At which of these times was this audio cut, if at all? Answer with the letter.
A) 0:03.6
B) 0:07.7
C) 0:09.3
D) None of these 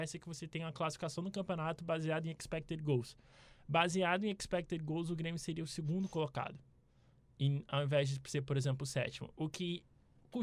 D